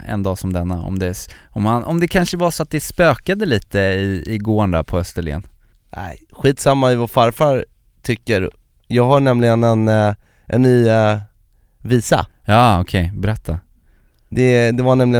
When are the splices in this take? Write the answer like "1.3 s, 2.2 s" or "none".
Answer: 6.3 s